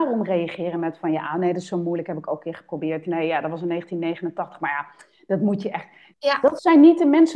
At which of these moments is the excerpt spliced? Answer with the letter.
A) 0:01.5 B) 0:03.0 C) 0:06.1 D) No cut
C